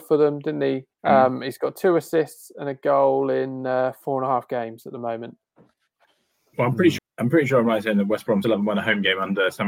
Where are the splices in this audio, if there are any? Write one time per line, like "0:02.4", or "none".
0:00.9
0:07.0
0:08.4